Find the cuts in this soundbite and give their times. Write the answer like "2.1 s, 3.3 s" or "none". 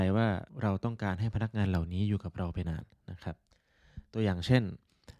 2.6 s